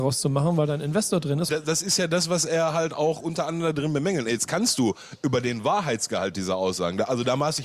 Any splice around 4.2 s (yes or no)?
no